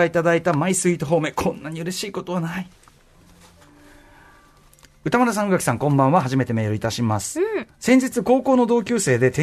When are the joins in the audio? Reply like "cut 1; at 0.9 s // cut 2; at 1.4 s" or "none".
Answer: none